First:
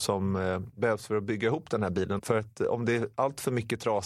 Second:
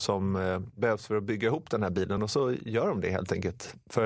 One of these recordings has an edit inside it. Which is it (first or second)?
first